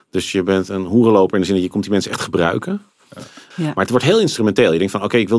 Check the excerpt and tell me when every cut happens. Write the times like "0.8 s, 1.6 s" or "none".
3.5 s

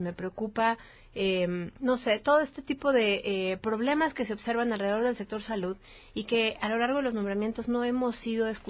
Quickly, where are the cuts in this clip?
1.8 s

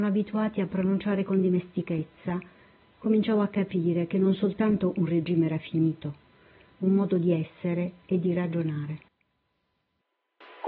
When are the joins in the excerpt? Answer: 2.9 s, 6.7 s

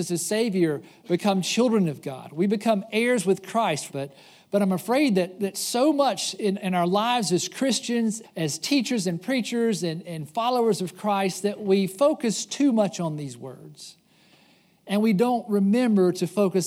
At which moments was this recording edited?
3.9 s, 8.2 s

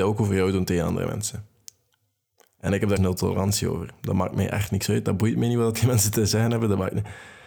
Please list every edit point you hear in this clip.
3.0 s

